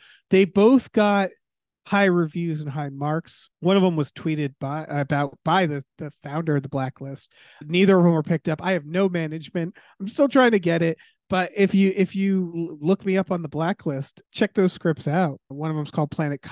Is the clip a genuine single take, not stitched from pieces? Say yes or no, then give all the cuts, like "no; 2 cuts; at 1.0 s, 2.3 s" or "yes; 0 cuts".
yes; 0 cuts